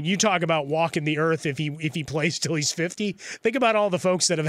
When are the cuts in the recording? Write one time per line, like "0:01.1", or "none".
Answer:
none